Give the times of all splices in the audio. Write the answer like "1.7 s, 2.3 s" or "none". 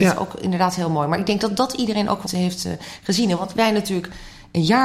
2.3 s